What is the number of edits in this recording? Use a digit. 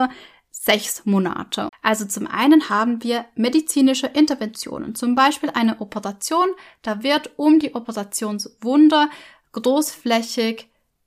1